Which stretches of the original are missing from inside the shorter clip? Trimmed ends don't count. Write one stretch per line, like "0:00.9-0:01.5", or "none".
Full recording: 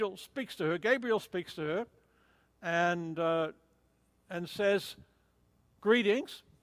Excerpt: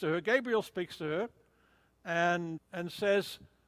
0:03.1-0:04.1